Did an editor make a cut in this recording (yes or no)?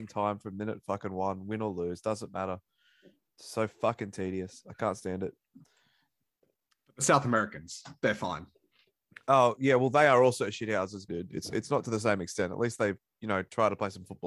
yes